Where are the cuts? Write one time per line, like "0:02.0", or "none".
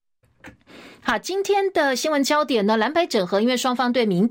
0:01.0